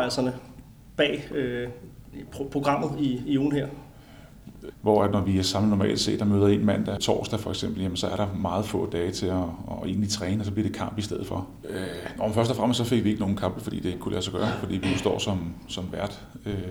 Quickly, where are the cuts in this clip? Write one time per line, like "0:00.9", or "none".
0:04.7
0:07.0
0:11.6